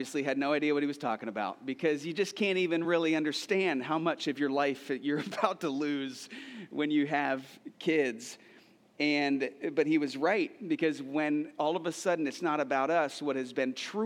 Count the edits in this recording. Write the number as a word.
zero